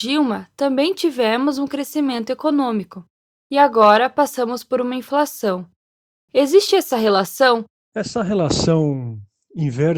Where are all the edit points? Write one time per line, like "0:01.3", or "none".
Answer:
0:07.9